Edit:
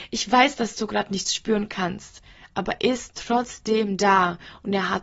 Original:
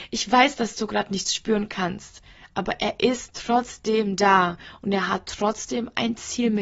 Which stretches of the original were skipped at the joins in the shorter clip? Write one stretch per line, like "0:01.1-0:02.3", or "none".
0:02.8-0:03.0